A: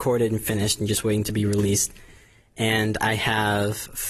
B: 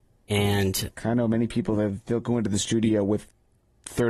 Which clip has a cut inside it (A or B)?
B